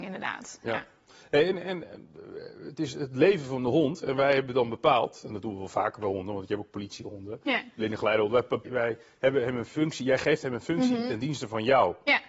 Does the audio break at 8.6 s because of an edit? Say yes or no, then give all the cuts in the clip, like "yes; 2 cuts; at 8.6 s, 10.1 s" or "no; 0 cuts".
yes; 1 cut; at 8.6 s